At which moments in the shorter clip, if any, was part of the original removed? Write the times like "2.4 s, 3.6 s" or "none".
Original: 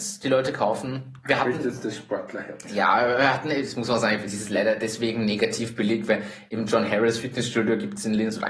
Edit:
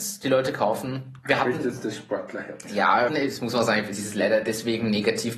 3.1 s